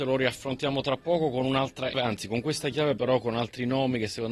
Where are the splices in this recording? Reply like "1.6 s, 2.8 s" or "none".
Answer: 1.9 s